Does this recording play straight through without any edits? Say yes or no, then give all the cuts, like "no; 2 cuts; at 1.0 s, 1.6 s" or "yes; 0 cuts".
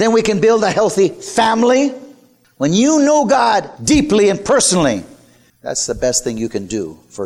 yes; 0 cuts